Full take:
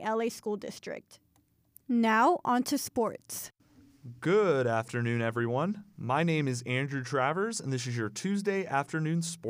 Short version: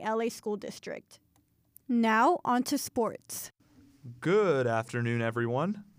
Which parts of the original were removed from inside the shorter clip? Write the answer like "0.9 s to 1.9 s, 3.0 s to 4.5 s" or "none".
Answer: none